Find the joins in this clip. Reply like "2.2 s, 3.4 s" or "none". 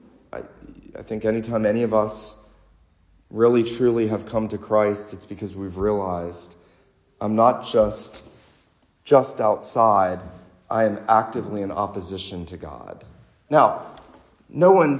none